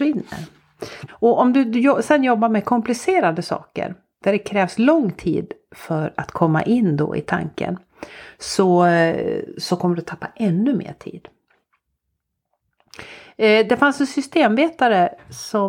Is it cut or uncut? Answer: cut